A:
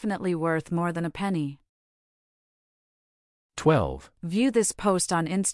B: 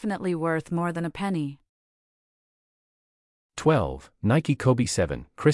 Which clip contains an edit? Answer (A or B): A